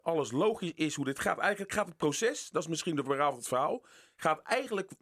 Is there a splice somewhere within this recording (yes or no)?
no